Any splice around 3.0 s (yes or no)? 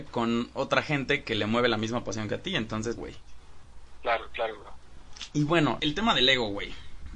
yes